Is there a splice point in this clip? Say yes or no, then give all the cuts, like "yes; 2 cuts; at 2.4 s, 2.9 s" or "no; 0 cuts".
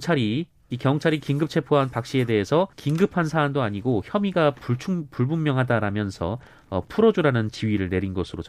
yes; 1 cut; at 2.7 s